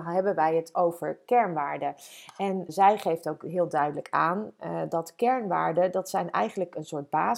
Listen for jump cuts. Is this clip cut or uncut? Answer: cut